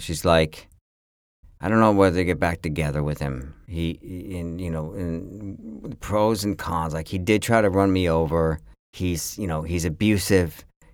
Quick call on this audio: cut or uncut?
cut